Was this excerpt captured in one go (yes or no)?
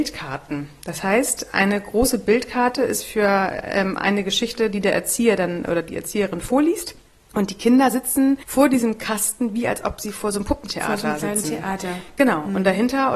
yes